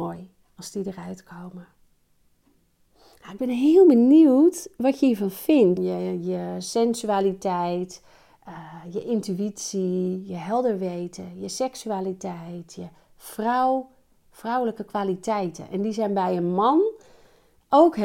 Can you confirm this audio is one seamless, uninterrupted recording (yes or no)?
no